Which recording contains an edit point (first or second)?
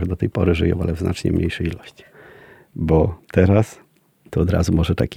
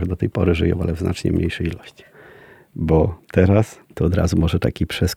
second